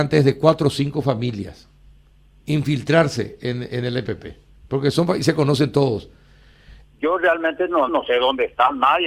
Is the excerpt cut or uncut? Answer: cut